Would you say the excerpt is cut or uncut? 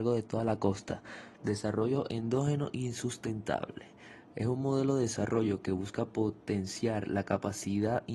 cut